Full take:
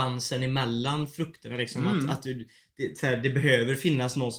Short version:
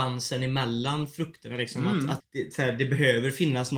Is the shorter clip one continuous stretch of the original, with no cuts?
no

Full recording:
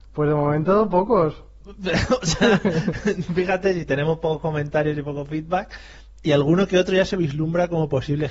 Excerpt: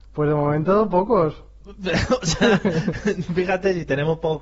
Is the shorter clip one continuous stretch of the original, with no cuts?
yes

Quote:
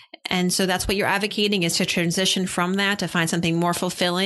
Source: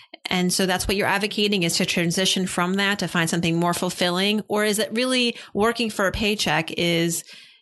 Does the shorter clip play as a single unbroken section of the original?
yes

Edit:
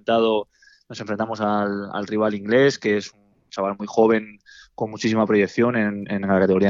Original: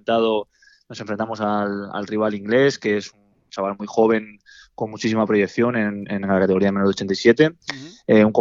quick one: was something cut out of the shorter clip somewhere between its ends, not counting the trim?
no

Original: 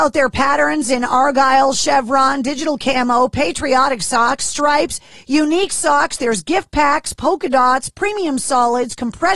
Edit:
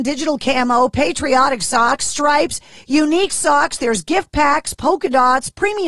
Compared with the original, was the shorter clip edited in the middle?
no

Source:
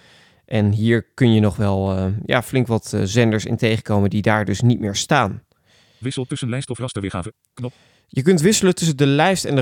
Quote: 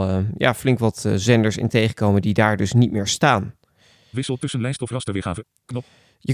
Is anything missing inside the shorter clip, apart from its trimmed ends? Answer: no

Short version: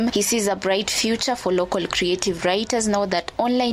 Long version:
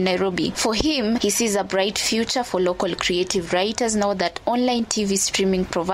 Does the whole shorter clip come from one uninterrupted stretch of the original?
yes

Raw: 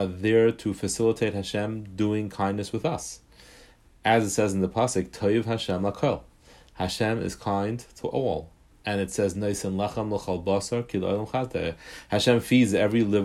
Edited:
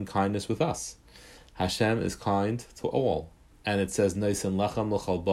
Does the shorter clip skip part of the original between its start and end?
yes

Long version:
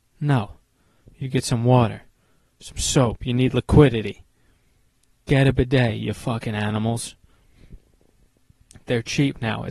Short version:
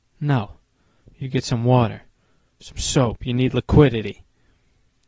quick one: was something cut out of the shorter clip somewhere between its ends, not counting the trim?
no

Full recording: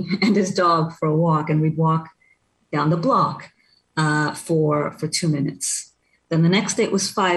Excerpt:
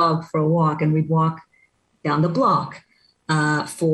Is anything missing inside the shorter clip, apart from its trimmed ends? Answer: no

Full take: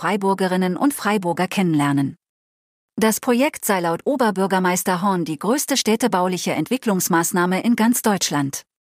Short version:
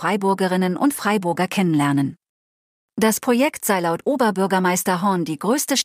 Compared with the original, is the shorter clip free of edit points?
yes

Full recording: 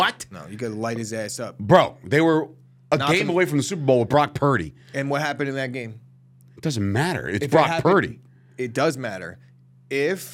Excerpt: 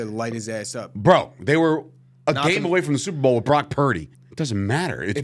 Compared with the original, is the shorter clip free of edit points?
no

